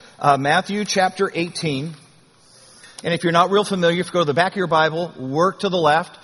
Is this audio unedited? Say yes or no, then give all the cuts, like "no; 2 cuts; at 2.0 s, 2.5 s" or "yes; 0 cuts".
yes; 0 cuts